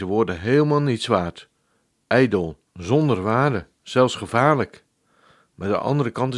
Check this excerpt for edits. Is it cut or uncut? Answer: cut